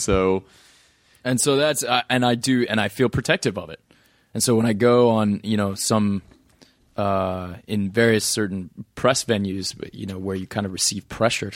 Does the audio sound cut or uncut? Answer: uncut